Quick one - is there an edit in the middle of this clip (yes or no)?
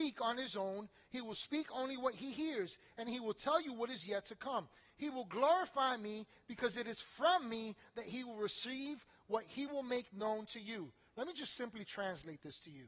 no